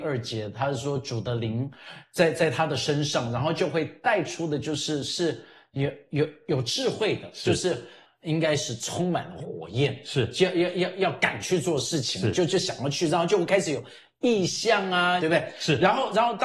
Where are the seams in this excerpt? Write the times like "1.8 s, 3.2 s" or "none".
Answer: 8.0 s, 15.2 s